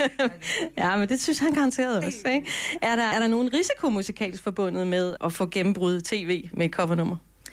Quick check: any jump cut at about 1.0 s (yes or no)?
no